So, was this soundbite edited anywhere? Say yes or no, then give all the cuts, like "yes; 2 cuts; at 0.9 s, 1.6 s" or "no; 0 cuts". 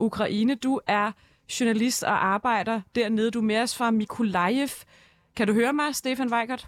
no; 0 cuts